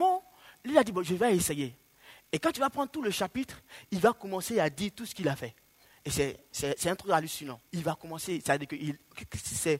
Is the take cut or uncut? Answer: cut